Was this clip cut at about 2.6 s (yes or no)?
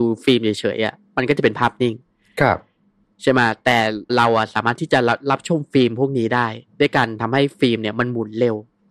no